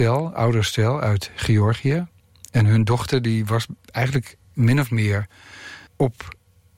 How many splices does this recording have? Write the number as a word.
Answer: one